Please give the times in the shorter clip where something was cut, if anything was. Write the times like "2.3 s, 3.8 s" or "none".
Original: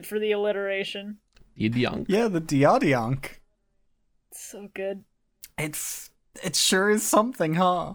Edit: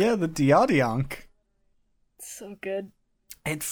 none